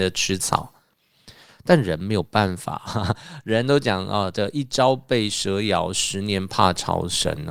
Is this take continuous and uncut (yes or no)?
yes